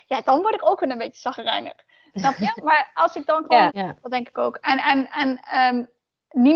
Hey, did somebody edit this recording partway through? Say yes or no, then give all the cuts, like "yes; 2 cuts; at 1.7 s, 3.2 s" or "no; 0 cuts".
yes; 1 cut; at 3.7 s